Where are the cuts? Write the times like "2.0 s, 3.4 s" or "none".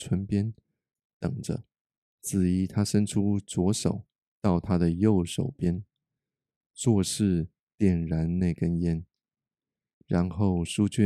none